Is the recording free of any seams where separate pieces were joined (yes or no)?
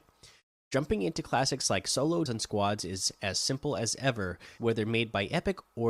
no